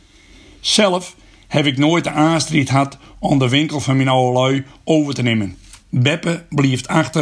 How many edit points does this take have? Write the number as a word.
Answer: one